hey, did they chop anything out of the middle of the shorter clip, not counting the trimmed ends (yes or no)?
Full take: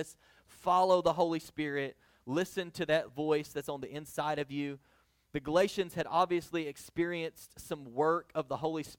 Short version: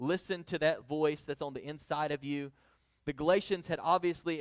no